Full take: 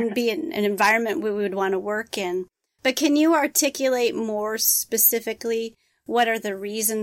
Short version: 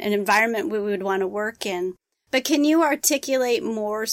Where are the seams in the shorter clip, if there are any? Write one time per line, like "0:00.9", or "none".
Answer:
none